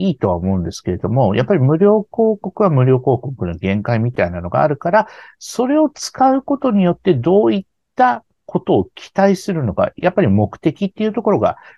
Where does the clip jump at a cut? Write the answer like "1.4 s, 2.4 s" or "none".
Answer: none